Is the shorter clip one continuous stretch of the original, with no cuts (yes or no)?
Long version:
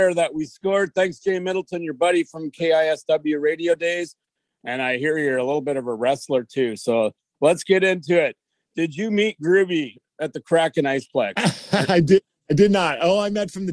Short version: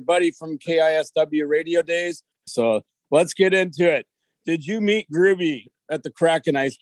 no